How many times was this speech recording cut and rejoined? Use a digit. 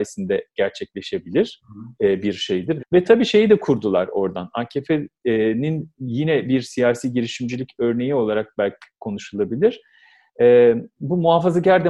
1